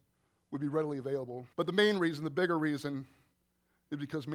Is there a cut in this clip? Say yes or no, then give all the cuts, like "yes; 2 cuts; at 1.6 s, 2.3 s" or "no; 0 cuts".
yes; 1 cut; at 1.5 s